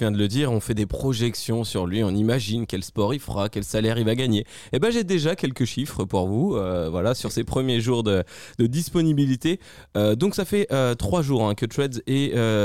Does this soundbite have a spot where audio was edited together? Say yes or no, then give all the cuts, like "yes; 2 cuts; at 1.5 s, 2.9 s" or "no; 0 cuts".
no; 0 cuts